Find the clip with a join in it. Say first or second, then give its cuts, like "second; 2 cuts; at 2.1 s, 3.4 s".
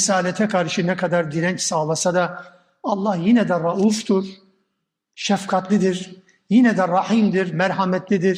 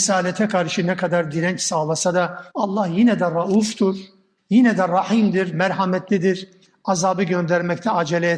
second; 2 cuts; at 2.5 s, 4.4 s